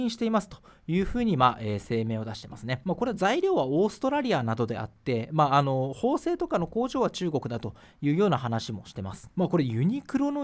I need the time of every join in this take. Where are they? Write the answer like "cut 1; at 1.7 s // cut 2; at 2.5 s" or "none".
cut 1; at 9.3 s